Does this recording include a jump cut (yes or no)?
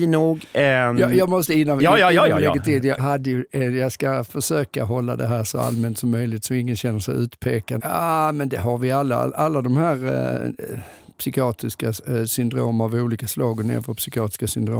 yes